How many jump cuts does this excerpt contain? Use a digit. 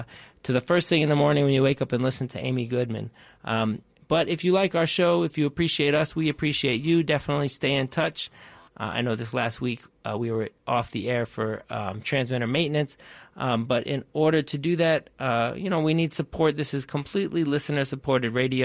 1